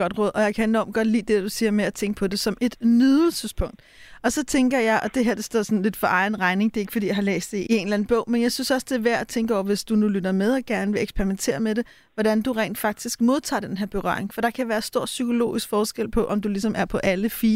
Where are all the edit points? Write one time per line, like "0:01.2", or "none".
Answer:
none